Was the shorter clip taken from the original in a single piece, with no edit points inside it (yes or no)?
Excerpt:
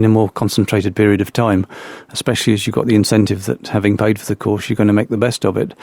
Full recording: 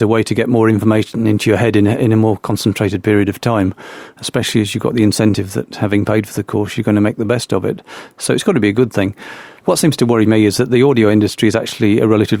yes